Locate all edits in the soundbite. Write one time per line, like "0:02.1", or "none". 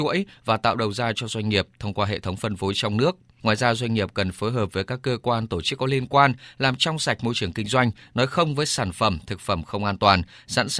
none